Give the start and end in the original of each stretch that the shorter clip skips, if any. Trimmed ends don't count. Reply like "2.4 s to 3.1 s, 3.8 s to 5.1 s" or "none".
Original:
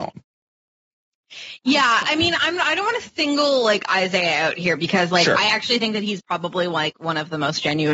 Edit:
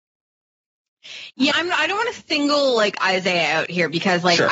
1.8 s to 2.4 s